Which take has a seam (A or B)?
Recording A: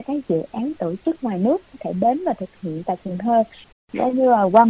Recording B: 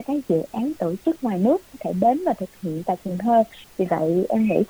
A